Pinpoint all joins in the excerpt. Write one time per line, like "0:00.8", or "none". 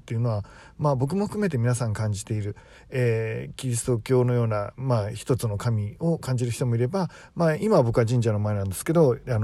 none

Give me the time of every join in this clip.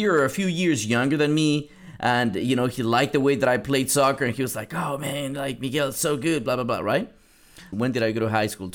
0:07.7

